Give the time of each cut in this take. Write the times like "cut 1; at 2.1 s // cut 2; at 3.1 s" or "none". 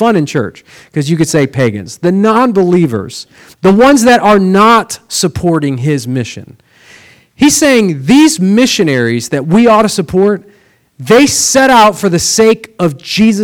cut 1; at 3.5 s

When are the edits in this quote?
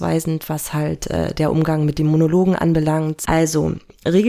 cut 1; at 3.2 s

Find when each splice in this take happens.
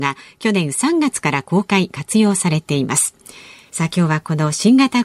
cut 1; at 3.7 s

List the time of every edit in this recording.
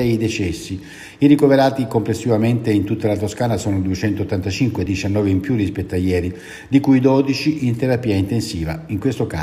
none

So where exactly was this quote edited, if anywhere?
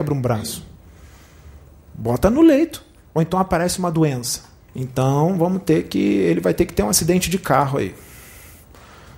cut 1; at 4.7 s

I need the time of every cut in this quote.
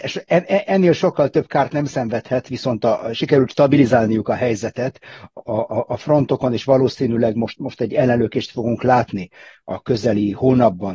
cut 1; at 5.4 s

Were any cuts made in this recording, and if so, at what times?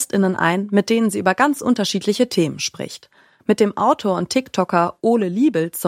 none

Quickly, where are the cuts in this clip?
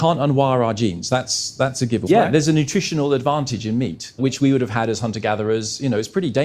cut 1; at 2.1 s // cut 2; at 4.2 s

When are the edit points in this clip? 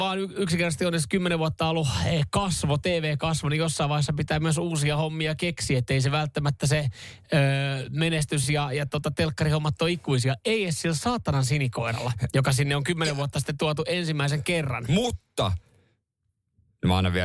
none

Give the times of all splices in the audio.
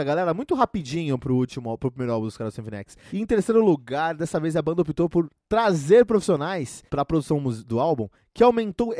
cut 1; at 3.1 s // cut 2; at 6.9 s

